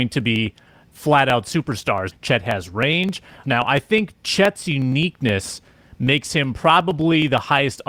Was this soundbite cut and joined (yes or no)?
yes